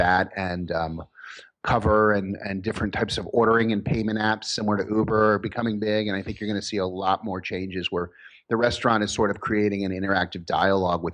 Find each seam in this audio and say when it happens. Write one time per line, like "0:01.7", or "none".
none